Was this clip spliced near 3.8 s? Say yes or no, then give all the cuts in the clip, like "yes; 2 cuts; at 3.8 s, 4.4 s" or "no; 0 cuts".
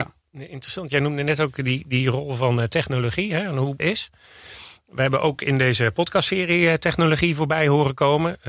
yes; 1 cut; at 3.8 s